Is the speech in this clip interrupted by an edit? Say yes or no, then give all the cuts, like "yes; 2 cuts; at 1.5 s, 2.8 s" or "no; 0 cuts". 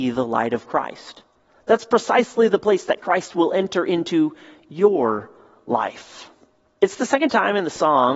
yes; 1 cut; at 6.7 s